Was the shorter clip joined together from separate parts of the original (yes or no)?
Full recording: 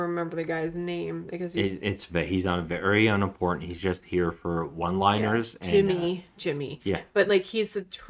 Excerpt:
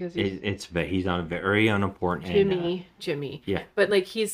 yes